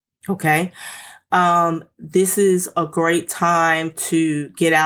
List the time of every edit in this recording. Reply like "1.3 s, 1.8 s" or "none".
none